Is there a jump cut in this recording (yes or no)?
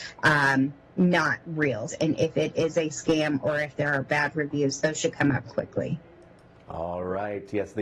yes